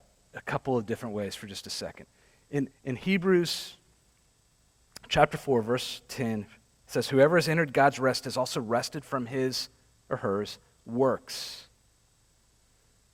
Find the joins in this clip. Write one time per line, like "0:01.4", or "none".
0:02.7